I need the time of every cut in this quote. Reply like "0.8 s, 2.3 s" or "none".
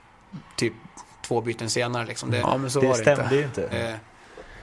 2.4 s, 3.7 s